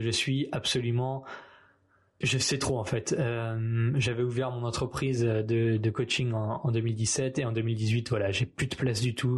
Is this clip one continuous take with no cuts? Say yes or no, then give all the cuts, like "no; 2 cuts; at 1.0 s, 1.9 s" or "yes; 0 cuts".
no; 1 cut; at 2.2 s